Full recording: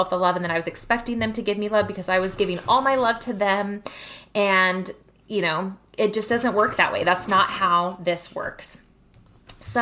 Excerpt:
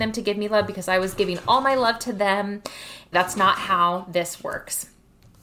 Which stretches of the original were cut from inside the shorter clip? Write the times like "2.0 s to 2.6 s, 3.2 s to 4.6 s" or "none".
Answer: 4.3 s to 7.0 s